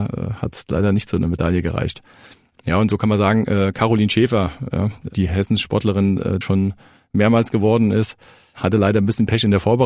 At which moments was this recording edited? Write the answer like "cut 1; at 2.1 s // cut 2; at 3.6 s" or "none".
cut 1; at 6.4 s